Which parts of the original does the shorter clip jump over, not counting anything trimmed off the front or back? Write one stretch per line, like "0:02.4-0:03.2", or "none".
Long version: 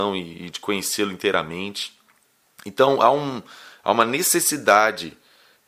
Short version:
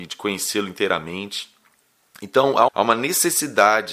0:03.1-0:03.8